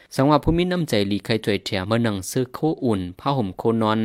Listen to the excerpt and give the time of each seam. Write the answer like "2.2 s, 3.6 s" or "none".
1.8 s

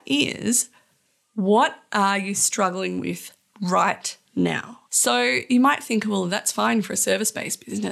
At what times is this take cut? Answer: 4.9 s

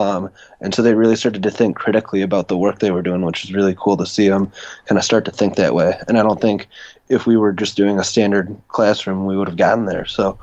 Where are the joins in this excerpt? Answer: none

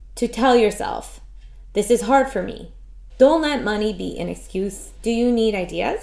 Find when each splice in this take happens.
3.1 s, 5.0 s

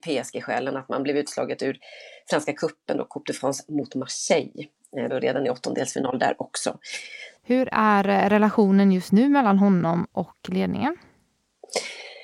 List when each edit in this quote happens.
5.1 s, 7.4 s

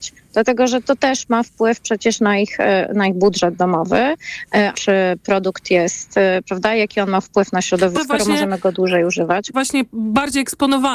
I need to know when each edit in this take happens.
4.7 s, 7.9 s, 9.5 s

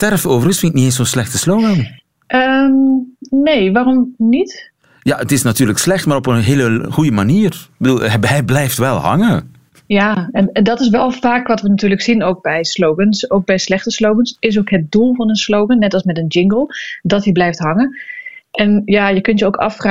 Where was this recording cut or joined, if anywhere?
none

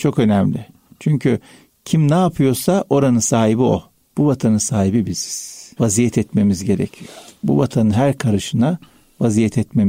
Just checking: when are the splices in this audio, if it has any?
4.1 s, 5.8 s

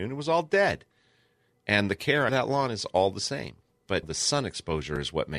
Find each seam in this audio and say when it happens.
2.3 s, 4.0 s

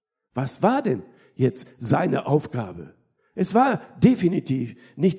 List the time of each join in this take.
none

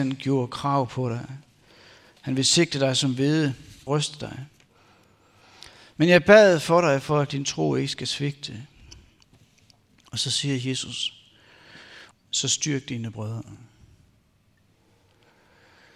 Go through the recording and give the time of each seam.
3.9 s, 12.1 s

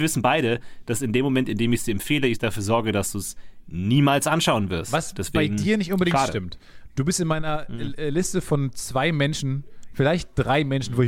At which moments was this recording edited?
none

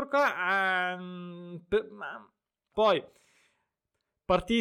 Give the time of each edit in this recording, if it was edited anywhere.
2.7 s

